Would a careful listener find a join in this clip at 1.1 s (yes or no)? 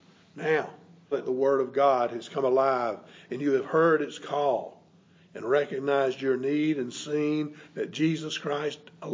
yes